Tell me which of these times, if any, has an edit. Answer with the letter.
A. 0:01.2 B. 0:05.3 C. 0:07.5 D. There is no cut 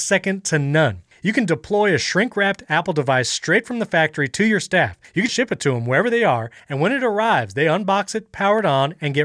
B